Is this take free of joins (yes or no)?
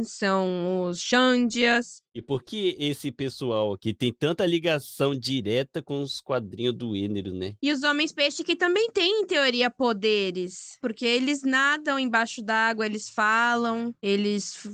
no